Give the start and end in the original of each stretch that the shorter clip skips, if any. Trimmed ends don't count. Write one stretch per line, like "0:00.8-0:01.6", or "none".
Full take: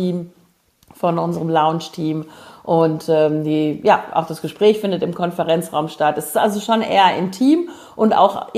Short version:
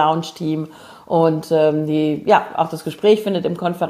none